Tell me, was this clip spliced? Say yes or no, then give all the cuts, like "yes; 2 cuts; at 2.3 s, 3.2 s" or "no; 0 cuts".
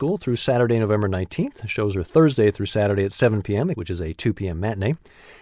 yes; 1 cut; at 3.7 s